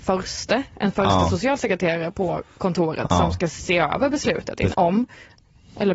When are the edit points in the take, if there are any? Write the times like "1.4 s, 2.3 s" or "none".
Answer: 4.7 s